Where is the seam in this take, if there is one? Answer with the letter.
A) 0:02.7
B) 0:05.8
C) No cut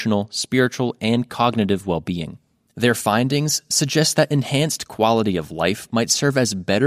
C